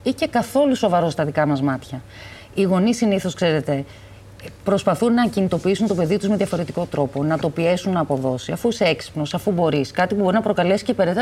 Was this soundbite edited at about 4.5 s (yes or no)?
no